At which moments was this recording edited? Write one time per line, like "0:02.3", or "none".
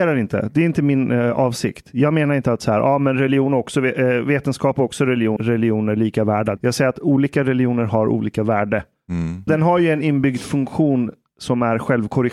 0:05.4
0:06.6
0:09.5